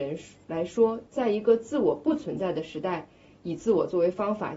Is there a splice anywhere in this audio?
no; 0 cuts

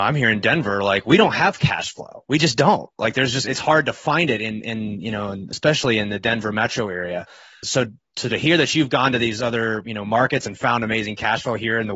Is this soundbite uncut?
no; 1 cut; at 7.6 s

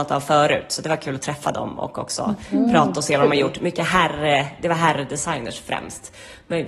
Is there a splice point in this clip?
no; 0 cuts

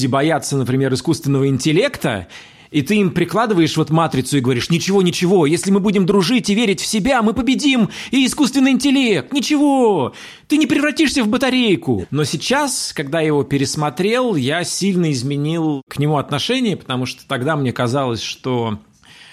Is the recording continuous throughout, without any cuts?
no; 1 cut; at 12.0 s

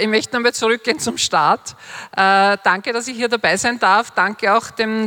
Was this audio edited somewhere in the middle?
no; 0 cuts

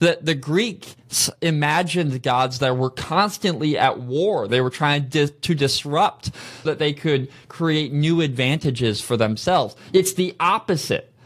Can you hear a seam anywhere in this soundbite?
yes; 2 cuts; at 4.5 s, 6.7 s

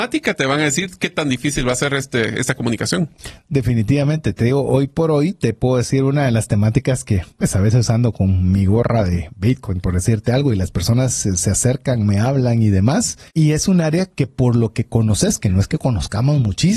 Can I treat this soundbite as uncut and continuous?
no; 1 cut; at 13.3 s

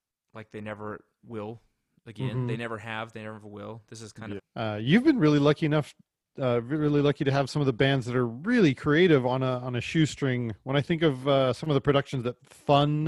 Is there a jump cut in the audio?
yes; 1 cut; at 4.4 s

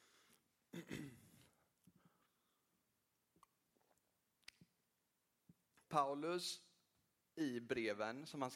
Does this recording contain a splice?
no; 0 cuts

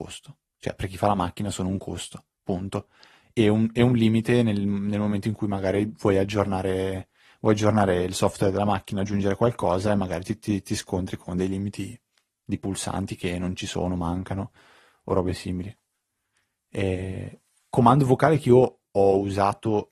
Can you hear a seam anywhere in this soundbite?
no; 0 cuts

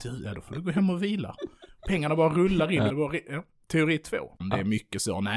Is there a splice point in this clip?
yes; 2 cuts; at 2.9 s, 4.4 s

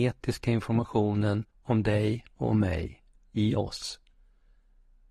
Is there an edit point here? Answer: yes; 1 cut; at 1.5 s

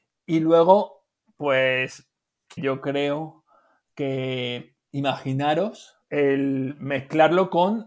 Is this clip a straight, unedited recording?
no; 2 cuts; at 2.6 s, 6.0 s

